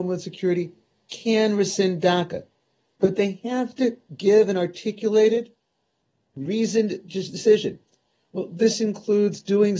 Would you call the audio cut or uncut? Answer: uncut